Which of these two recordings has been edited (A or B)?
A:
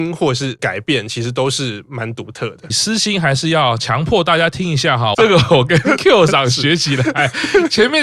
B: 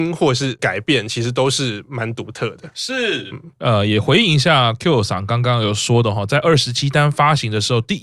A